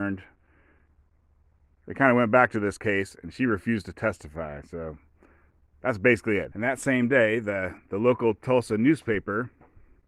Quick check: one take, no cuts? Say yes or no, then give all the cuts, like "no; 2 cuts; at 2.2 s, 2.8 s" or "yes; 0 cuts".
no; 1 cut; at 6.5 s